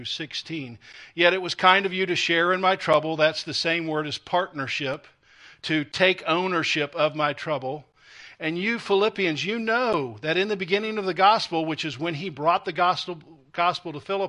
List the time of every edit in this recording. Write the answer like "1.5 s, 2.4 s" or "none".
none